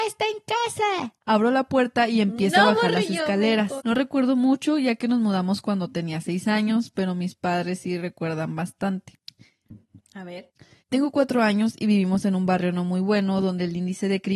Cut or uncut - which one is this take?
cut